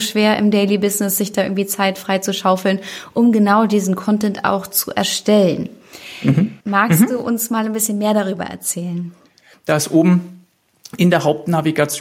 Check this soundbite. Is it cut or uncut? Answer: cut